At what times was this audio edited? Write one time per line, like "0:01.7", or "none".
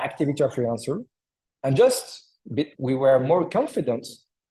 0:02.7